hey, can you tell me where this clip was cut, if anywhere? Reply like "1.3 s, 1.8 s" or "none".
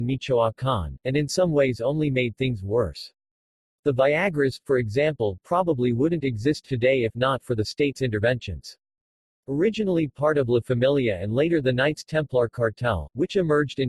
none